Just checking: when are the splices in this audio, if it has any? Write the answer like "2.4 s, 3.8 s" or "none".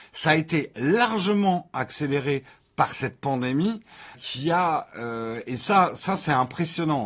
4.1 s

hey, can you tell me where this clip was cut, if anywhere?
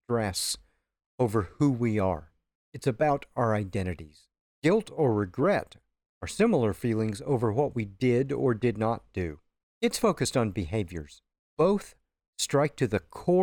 none

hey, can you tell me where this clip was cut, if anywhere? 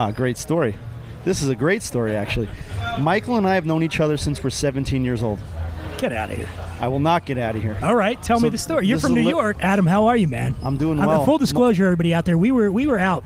9.6 s

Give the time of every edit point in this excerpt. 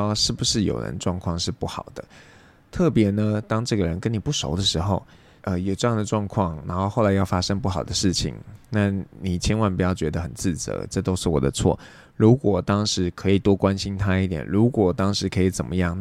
5.4 s, 10.9 s

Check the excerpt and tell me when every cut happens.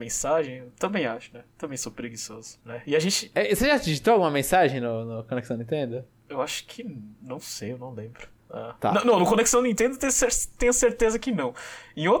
2.6 s

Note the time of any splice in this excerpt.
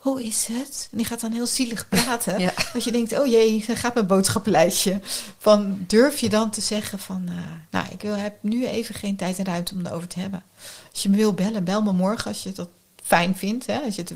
none

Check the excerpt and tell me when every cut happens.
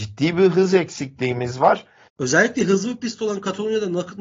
2.1 s

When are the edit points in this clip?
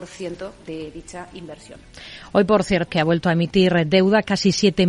2.9 s

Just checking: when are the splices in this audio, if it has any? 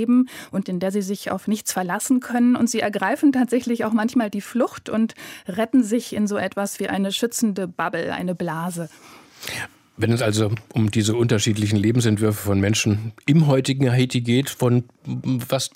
none

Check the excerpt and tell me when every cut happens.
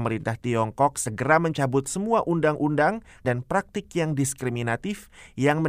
3.2 s

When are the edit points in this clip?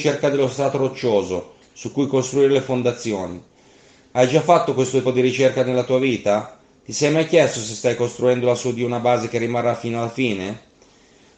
5.0 s

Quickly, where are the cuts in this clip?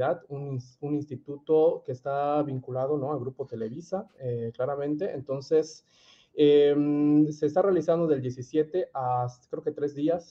none

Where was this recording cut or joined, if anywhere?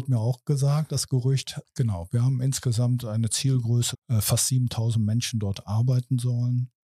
1.6 s, 3.9 s

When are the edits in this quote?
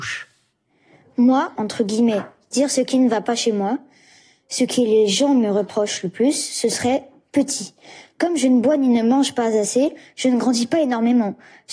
1.6 s

